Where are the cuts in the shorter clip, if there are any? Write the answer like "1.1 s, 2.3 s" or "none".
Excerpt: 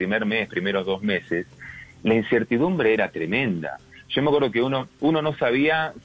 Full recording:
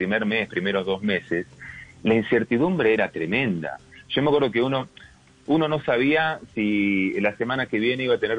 4.9 s